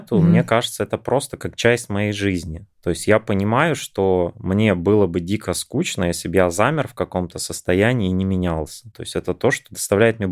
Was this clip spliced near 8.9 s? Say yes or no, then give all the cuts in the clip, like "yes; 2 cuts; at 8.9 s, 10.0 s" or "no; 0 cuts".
yes; 1 cut; at 8.9 s